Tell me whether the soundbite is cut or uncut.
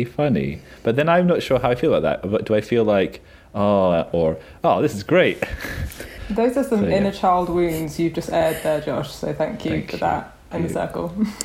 cut